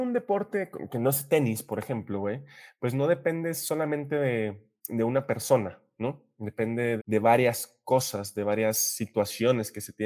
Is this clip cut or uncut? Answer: cut